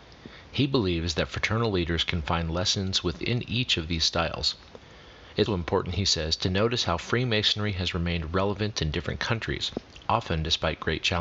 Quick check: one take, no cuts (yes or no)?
no